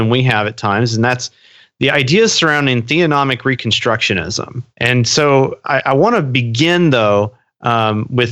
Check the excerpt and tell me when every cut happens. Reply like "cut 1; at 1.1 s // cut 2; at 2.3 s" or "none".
cut 1; at 4.7 s

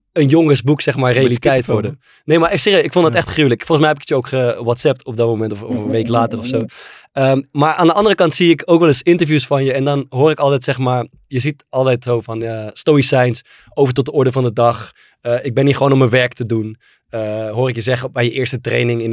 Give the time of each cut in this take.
none

